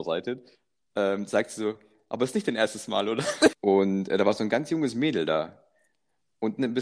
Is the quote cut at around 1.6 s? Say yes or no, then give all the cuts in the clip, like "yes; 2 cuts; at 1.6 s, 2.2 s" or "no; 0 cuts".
no; 1 cut; at 3.5 s